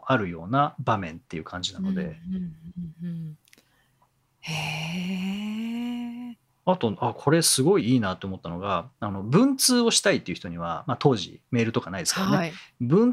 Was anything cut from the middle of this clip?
yes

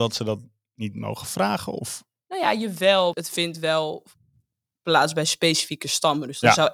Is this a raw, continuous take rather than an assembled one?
no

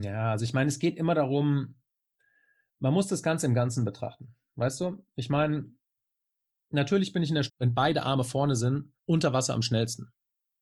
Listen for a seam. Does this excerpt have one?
yes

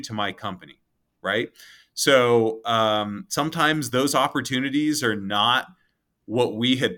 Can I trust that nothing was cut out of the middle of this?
yes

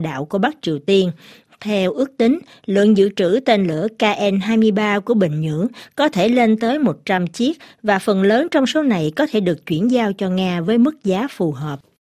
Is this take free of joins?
yes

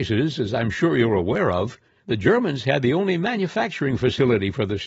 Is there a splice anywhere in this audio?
yes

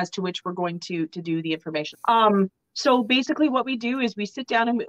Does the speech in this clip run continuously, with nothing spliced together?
no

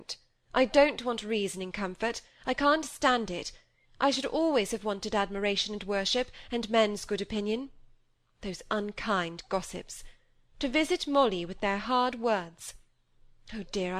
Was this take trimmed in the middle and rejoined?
no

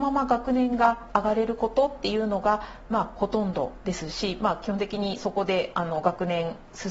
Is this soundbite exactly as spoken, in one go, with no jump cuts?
yes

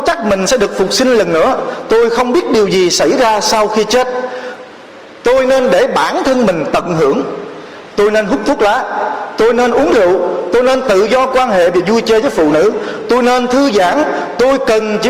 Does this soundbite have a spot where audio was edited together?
no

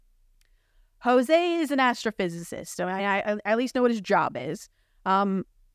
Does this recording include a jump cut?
no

